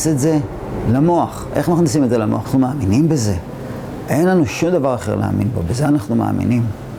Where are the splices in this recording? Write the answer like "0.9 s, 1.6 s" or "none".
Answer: 2.4 s